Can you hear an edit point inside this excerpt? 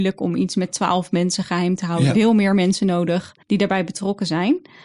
yes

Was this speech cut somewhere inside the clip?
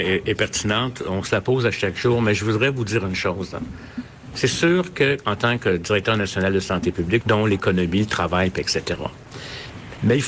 yes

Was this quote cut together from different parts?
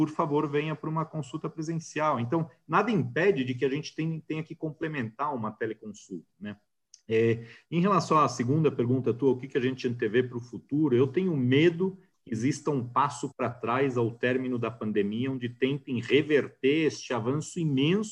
no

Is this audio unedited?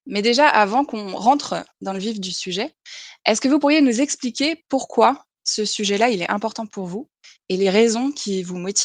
yes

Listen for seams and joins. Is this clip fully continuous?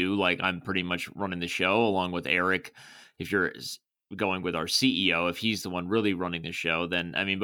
yes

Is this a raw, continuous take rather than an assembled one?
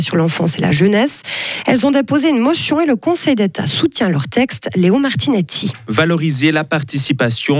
yes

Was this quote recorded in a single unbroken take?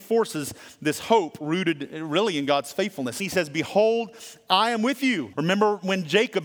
no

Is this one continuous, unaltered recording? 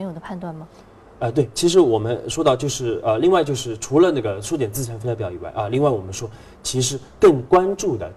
yes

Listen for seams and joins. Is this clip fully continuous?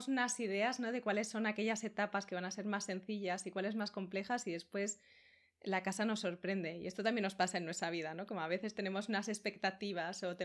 yes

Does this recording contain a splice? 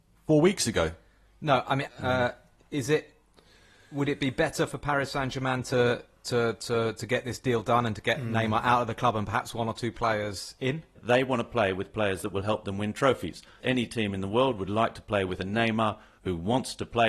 yes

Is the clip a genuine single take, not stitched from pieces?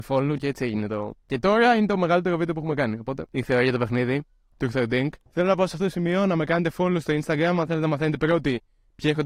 no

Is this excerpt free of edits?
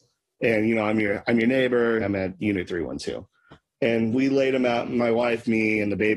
no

